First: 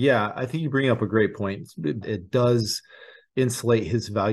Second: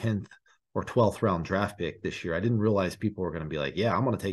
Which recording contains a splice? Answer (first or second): first